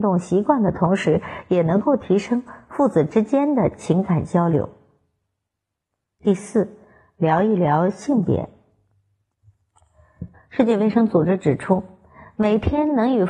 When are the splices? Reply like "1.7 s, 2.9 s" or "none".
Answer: 10.3 s